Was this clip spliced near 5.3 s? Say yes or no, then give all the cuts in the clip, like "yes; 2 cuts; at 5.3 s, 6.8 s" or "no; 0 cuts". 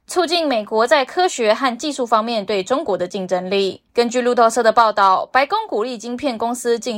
no; 1 cut; at 3.9 s